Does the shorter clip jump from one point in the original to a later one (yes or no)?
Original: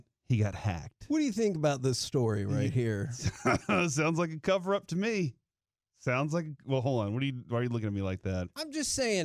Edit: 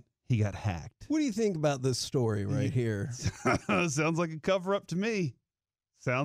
no